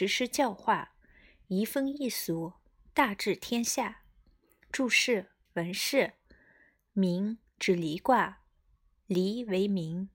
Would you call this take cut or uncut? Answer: cut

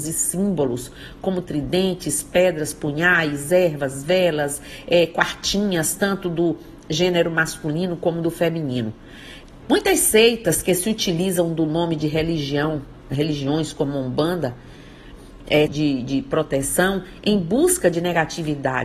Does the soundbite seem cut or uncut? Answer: cut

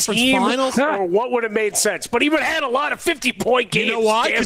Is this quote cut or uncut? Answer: uncut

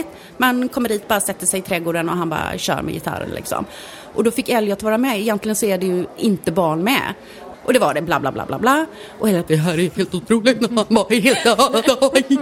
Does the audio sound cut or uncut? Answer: cut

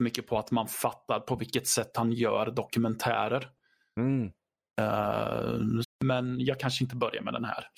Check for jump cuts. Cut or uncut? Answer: cut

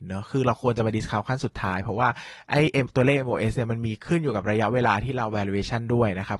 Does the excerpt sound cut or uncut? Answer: uncut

